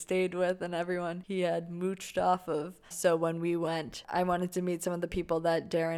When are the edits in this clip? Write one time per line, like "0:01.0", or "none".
0:02.9